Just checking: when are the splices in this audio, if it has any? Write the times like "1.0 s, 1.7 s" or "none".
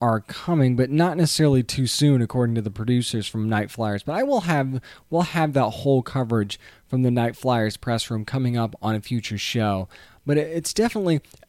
none